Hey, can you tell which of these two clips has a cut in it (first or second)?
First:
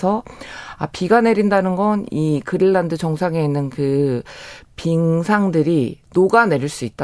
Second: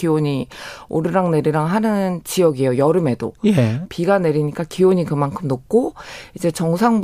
second